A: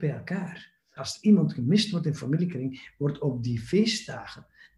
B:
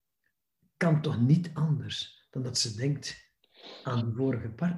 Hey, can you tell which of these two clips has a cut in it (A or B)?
A